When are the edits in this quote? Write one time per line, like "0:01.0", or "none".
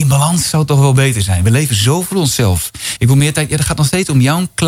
0:02.9